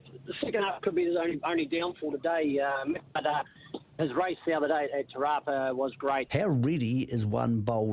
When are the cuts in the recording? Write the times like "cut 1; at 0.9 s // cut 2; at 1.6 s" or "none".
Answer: cut 1; at 4.0 s // cut 2; at 6.3 s